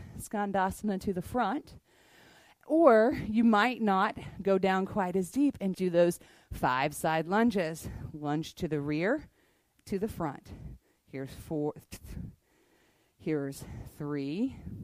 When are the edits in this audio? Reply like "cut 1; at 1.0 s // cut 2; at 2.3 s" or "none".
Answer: cut 1; at 5.7 s